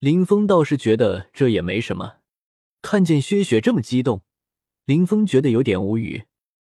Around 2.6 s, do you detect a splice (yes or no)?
yes